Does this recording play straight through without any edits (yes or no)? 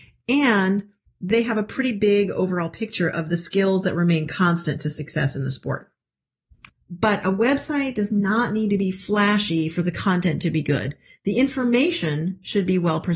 no